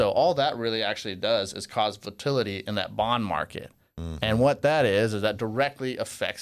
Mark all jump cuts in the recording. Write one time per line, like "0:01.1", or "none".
none